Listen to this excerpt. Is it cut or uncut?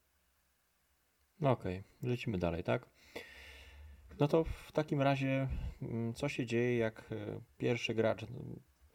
uncut